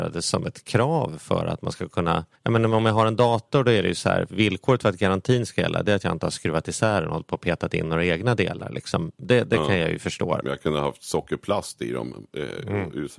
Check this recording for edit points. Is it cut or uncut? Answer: cut